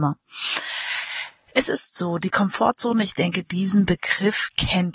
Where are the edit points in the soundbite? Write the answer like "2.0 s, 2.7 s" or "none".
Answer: none